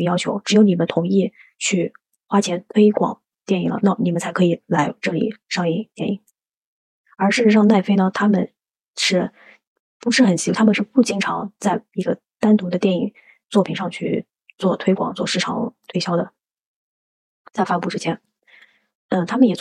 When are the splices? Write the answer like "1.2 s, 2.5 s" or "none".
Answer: none